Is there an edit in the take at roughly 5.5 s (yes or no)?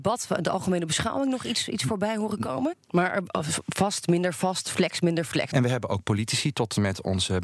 yes